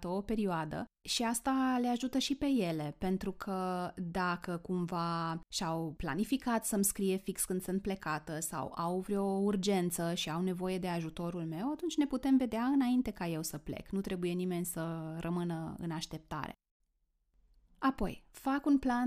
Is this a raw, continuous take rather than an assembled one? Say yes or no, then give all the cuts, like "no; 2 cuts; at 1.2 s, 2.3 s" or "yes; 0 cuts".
yes; 0 cuts